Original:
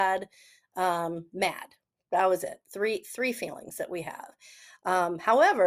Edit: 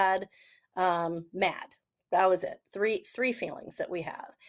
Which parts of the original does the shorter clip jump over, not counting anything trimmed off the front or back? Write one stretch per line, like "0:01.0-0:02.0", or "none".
none